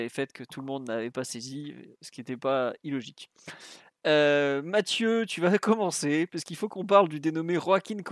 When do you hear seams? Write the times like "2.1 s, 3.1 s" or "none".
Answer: none